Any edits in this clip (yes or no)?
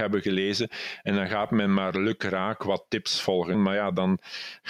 yes